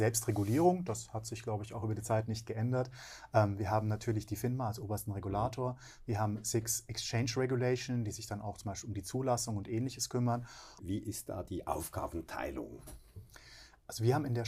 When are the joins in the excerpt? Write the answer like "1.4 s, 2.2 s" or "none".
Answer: 10.8 s